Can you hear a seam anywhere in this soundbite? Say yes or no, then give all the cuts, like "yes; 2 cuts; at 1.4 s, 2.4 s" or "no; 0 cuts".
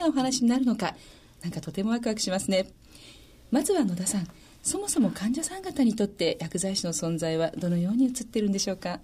no; 0 cuts